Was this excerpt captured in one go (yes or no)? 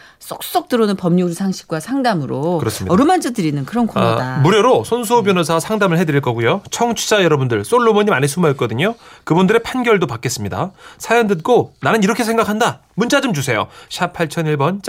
yes